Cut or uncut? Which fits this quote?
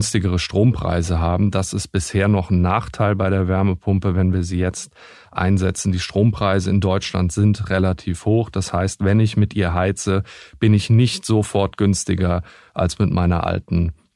uncut